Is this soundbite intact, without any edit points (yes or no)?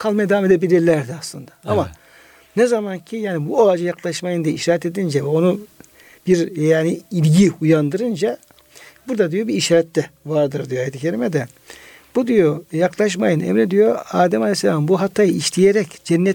yes